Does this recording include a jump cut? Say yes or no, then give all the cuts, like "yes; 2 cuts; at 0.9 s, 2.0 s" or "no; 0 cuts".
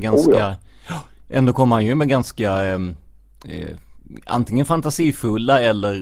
no; 0 cuts